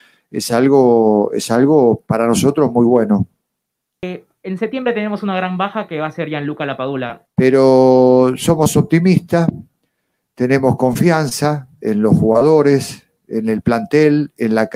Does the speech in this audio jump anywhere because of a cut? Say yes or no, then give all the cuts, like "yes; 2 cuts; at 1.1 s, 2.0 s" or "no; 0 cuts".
yes; 1 cut; at 7.3 s